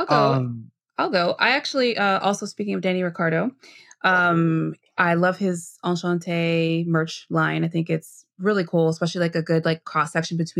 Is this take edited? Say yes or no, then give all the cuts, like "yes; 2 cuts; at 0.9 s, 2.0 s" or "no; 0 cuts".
no; 0 cuts